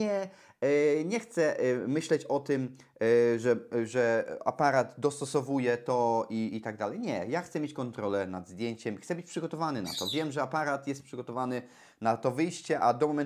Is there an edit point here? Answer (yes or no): no